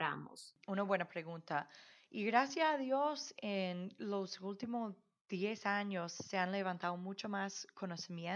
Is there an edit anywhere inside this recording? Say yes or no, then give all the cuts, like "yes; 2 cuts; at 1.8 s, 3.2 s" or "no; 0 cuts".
no; 0 cuts